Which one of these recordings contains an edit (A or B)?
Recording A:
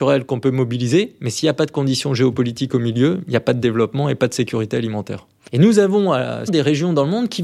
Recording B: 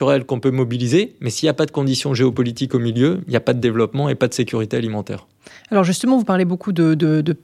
A